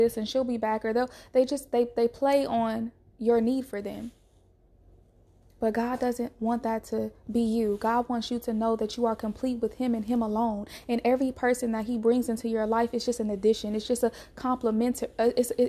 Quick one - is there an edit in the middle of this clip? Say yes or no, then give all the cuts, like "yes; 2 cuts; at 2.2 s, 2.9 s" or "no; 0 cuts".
no; 0 cuts